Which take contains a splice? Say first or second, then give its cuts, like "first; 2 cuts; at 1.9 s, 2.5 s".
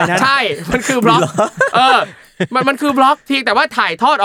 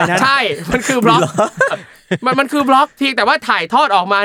second; 1 cut; at 1.7 s